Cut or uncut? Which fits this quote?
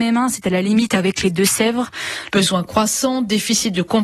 cut